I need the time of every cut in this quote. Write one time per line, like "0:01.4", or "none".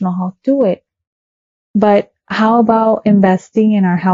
0:01.6